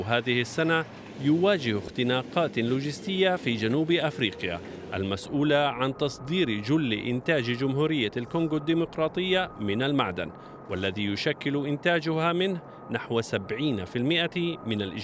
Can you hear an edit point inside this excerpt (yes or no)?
no